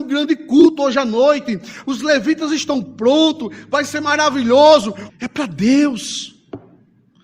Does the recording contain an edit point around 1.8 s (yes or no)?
yes